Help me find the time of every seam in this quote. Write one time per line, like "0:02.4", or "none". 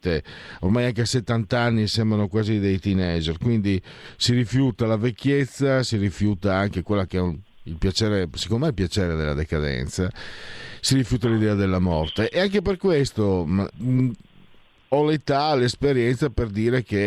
0:13.7